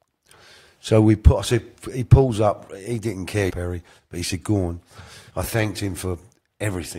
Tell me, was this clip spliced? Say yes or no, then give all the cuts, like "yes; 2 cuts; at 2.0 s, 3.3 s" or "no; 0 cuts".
yes; 2 cuts; at 3.5 s, 5.3 s